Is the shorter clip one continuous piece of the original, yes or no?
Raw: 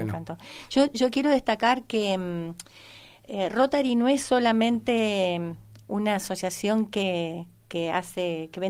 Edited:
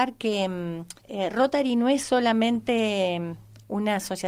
no